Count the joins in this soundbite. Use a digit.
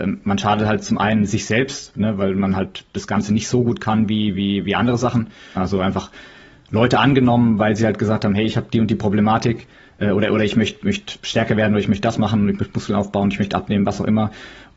1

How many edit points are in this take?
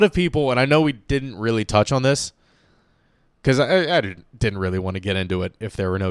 0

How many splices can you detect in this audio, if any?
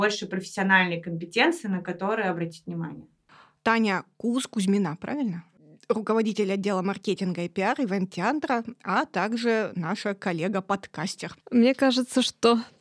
2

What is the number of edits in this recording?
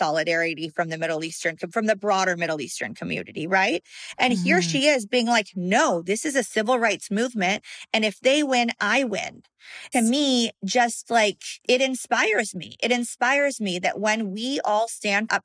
2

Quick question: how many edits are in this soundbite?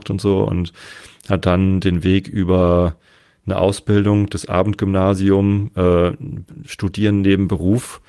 0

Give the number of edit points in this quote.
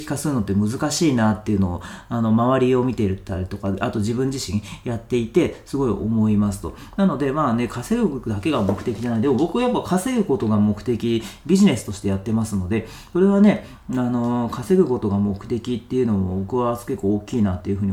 0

